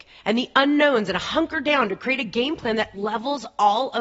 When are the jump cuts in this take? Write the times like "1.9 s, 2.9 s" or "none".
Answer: 2.9 s